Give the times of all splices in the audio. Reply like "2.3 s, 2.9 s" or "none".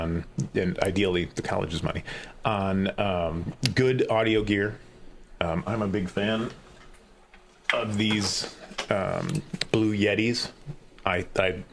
5.4 s